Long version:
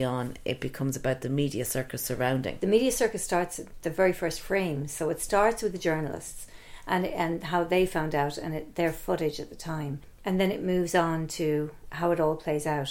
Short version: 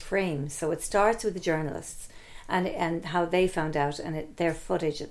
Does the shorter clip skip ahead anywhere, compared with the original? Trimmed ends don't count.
no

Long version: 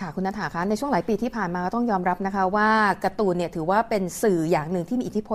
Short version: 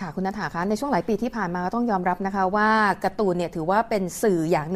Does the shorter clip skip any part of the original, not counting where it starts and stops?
no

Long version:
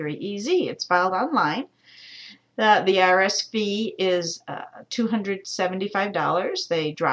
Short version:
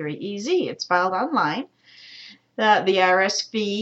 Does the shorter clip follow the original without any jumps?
yes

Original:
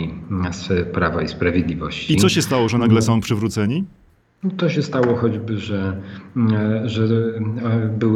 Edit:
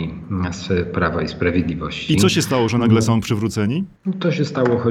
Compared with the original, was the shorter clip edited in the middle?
yes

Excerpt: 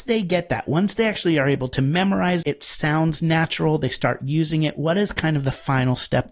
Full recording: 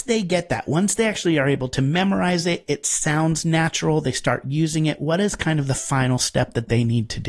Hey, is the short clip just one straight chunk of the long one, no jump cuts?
no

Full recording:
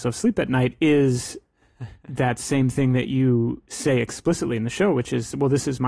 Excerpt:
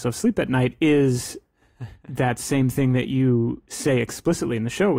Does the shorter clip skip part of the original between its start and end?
no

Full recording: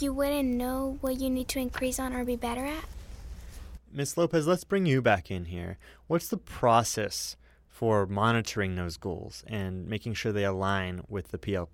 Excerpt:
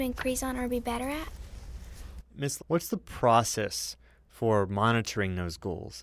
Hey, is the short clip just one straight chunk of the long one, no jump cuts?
no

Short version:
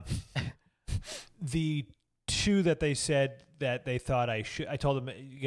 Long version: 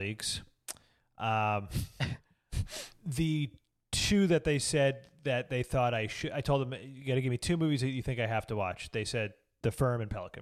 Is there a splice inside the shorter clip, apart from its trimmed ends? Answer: no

